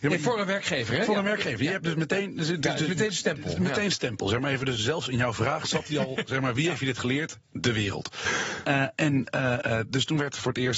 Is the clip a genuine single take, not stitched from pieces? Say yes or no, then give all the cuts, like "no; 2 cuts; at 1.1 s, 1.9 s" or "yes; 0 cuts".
yes; 0 cuts